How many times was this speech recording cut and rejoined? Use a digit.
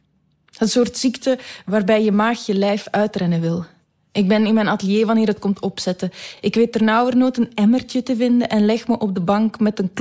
0